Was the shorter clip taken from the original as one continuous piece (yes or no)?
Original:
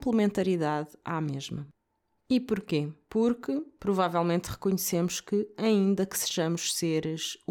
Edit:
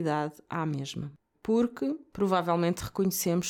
no